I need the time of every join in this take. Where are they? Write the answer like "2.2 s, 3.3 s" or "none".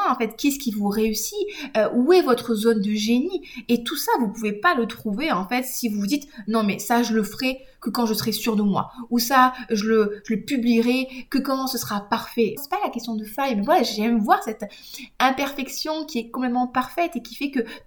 12.6 s